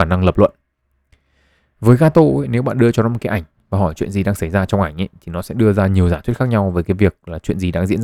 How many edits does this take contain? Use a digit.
0